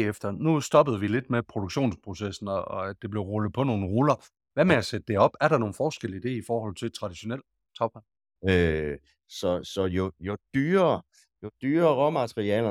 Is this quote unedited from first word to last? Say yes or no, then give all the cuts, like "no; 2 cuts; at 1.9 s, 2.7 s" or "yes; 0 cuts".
no; 1 cut; at 8.4 s